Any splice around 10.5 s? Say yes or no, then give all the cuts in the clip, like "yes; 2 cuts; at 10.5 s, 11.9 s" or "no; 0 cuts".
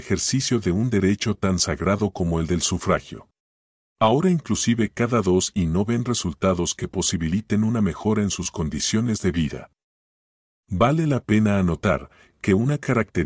yes; 2 cuts; at 3.9 s, 10.5 s